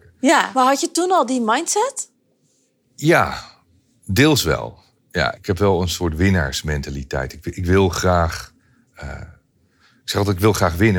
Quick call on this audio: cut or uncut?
cut